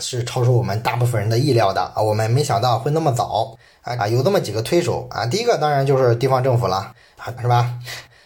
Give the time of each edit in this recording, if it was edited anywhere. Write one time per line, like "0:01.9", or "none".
0:04.0
0:07.4

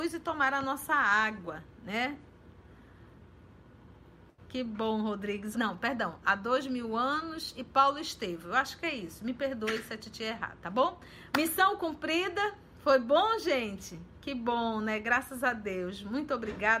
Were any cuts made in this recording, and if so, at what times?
0:05.5
0:11.3

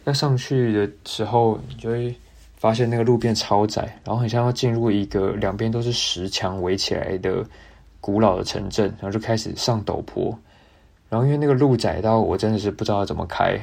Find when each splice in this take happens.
none

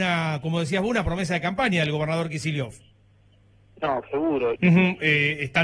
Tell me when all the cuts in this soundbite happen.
0:04.6

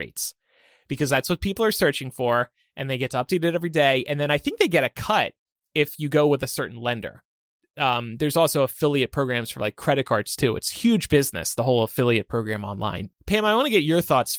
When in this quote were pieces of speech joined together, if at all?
0:13.1

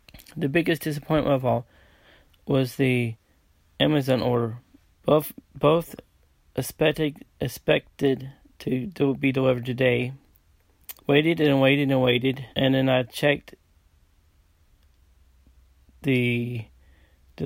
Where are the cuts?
0:04.9
0:11.0
0:12.5

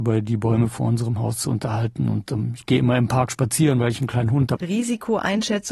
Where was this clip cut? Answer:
0:04.6

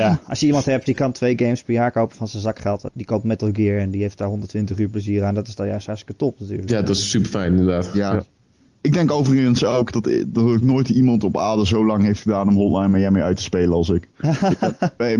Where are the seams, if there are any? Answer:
0:02.9

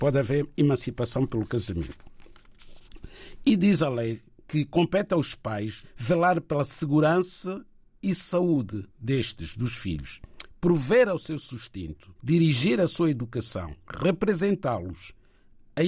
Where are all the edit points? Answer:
0:05.8
0:08.9
0:12.2

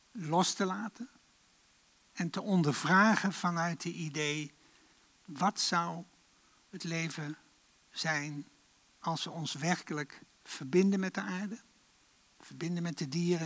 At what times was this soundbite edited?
none

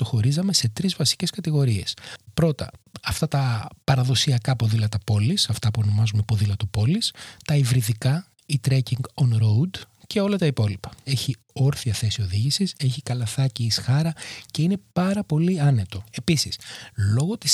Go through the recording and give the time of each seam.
0:11.1
0:12.8

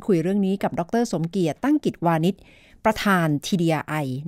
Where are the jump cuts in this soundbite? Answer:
none

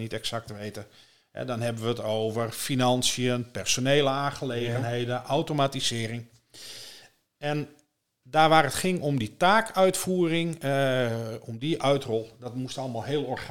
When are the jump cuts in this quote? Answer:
none

